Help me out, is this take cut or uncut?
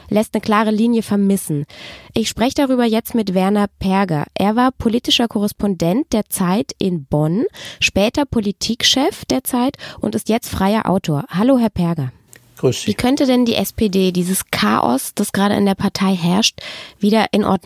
uncut